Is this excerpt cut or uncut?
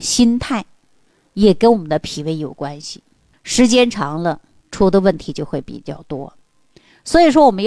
cut